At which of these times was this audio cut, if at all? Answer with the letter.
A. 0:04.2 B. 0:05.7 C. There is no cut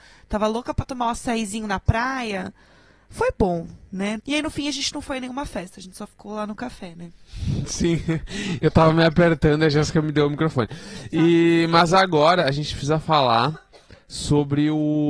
A